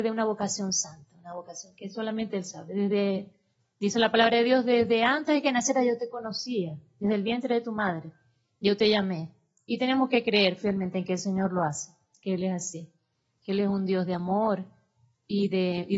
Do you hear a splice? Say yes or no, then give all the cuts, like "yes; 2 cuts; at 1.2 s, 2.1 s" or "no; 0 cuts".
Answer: no; 0 cuts